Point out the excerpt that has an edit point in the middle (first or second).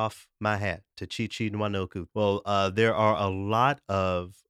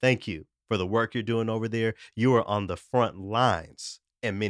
first